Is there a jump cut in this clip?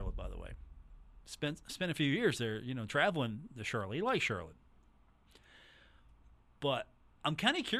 no; 0 cuts

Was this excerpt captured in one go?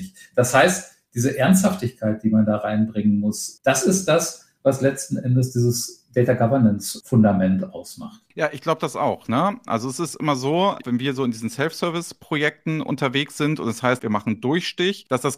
no; 2 cuts; at 10.8 s, 14.0 s

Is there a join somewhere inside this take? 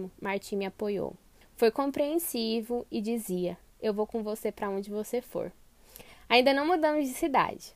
no; 0 cuts

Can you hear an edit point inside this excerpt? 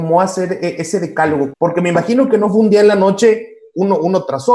yes; 1 cut; at 1.5 s

